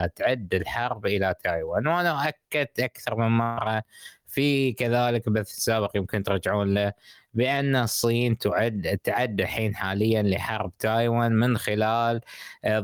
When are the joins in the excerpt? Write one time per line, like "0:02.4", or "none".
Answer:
none